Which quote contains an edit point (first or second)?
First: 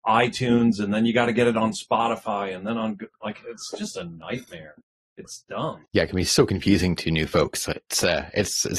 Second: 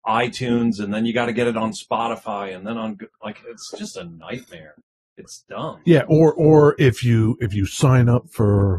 first